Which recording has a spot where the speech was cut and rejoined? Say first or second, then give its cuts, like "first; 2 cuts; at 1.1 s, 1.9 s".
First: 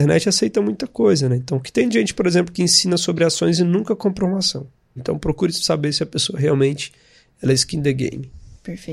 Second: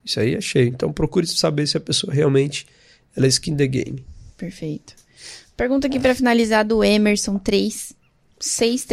first; 1 cut; at 5.0 s